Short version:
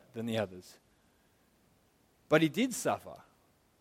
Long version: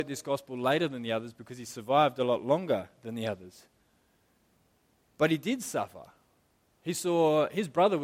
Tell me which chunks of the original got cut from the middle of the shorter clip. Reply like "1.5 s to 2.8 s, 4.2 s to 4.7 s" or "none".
none